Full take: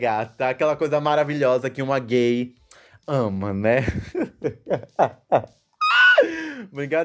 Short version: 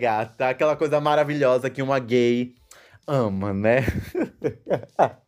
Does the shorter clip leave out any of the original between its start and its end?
no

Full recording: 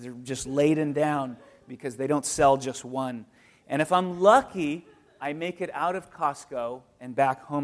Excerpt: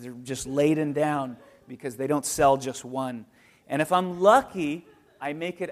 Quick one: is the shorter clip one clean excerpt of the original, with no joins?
yes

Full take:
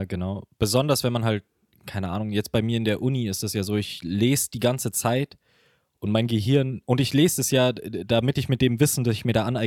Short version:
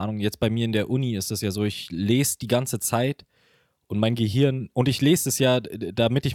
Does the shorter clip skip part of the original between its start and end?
no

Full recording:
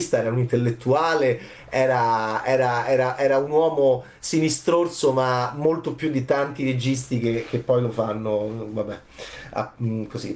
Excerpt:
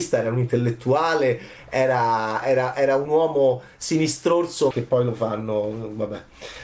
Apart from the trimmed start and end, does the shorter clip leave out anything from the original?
yes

